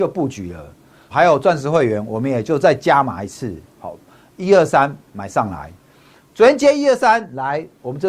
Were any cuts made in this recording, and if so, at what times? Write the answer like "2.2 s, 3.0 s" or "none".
1.1 s